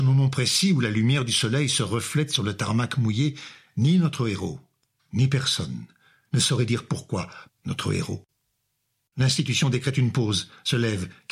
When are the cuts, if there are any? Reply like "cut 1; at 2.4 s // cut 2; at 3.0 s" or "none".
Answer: cut 1; at 7.5 s